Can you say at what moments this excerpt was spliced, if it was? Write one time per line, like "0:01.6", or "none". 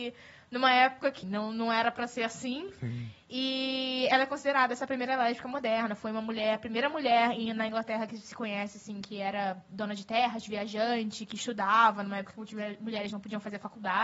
0:01.2